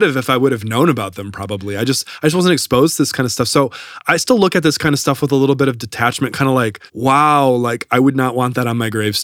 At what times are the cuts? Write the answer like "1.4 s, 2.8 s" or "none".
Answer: 6.9 s